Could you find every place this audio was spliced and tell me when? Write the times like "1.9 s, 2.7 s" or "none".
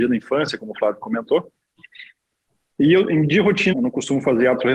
3.7 s